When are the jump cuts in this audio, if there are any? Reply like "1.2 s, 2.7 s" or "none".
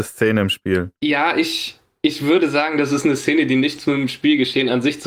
none